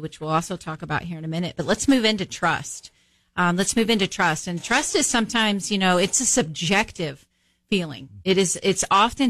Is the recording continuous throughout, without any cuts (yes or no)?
yes